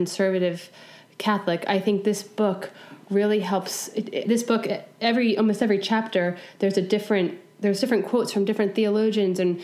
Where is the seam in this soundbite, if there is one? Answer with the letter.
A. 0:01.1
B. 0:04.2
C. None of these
B